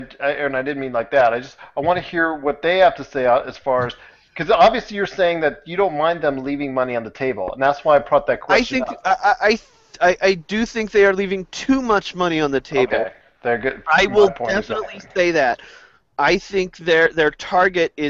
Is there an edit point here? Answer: no; 0 cuts

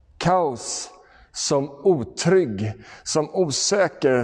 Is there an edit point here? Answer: no; 0 cuts

